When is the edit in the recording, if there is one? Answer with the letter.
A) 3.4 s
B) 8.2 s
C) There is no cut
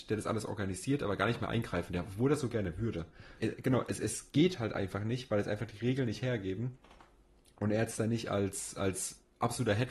A